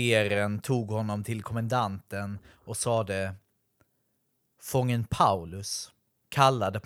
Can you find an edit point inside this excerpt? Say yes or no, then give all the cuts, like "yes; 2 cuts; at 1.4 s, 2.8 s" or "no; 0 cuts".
no; 0 cuts